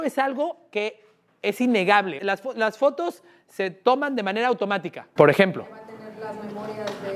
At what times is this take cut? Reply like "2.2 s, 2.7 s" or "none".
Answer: 2.2 s, 5.2 s